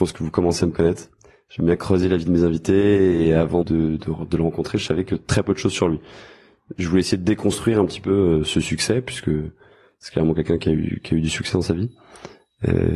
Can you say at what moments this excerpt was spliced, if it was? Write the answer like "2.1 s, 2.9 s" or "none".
3.6 s